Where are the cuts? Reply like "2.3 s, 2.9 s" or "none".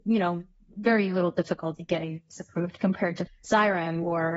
3.3 s